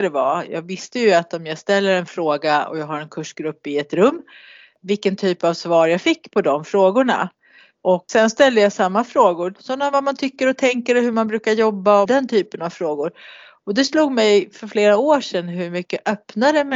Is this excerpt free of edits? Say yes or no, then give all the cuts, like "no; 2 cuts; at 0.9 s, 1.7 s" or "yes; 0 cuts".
no; 2 cuts; at 9.6 s, 12.1 s